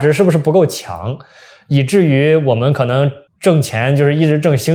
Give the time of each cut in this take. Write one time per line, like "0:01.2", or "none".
0:03.3